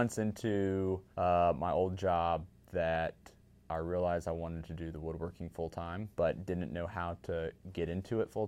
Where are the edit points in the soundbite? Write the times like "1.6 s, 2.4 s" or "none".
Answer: 1.1 s, 6.1 s